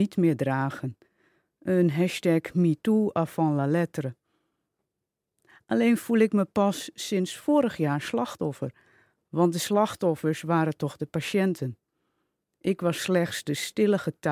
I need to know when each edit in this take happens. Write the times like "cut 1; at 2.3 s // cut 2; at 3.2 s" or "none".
none